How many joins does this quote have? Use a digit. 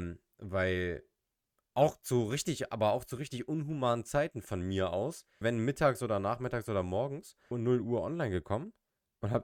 2